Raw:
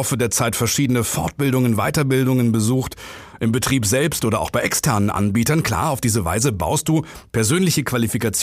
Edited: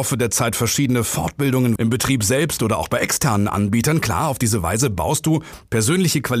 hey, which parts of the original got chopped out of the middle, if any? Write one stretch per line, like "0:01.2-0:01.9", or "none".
0:01.8-0:03.4